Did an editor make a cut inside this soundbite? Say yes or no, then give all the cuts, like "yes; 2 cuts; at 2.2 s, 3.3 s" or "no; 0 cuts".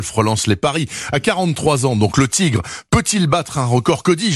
no; 0 cuts